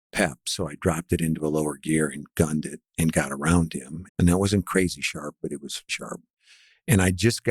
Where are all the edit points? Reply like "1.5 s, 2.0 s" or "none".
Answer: 4.1 s, 5.9 s